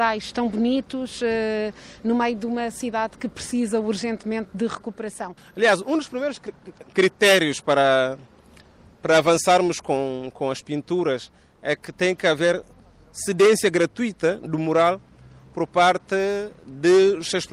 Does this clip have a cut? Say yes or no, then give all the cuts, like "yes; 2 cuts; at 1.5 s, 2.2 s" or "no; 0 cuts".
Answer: yes; 1 cut; at 5.4 s